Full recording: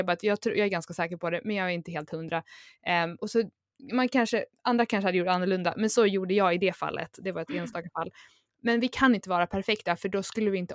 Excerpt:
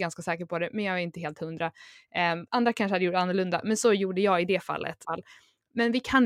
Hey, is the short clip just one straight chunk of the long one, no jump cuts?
no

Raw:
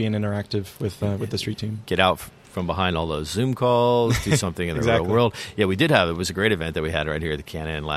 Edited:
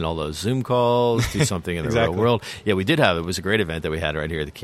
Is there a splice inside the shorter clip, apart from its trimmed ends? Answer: no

